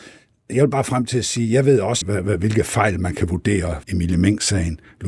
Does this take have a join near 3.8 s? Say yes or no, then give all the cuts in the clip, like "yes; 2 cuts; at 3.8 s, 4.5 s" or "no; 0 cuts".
yes; 2 cuts; at 2.0 s, 3.8 s